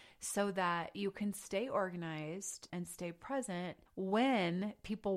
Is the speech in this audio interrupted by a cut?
yes; 2 cuts; at 2.7 s, 3.9 s

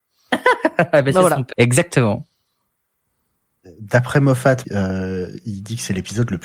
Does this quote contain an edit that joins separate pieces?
yes; 2 cuts; at 1.5 s, 4.6 s

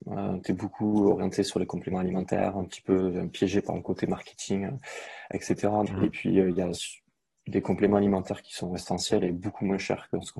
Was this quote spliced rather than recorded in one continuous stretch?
yes; 1 cut; at 5.9 s

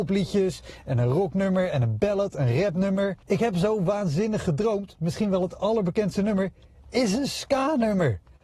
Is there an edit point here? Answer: yes; 1 cut; at 3.2 s

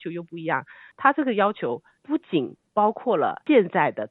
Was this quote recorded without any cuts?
yes; 0 cuts

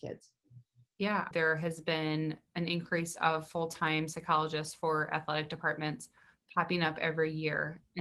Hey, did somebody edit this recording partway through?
yes; 1 cut; at 1.3 s

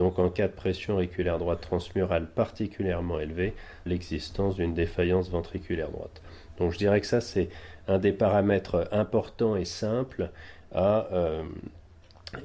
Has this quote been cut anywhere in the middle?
yes; 1 cut; at 3.9 s

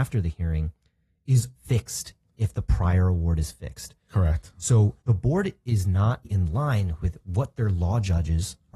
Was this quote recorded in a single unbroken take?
no; 3 cuts; at 1.5 s, 5.0 s, 6.2 s

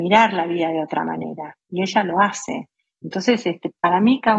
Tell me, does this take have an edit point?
no; 0 cuts

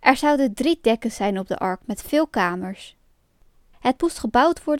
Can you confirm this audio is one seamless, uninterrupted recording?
no; 1 cut; at 3.7 s

